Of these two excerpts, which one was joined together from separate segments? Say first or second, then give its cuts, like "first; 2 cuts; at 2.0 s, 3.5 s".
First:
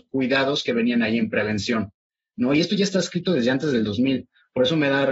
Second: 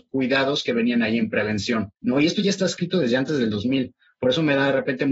second; 1 cut; at 2.0 s